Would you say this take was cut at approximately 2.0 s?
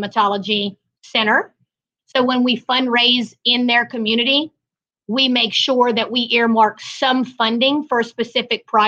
yes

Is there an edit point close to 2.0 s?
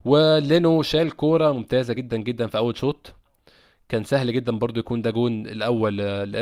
no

